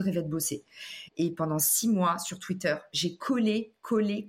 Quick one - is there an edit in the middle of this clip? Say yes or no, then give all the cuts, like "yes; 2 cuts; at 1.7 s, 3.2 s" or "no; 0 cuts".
yes; 1 cut; at 1.1 s